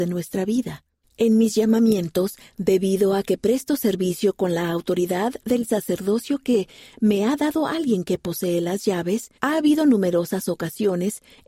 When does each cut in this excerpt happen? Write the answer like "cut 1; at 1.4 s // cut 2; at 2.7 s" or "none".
cut 1; at 1.0 s // cut 2; at 9.4 s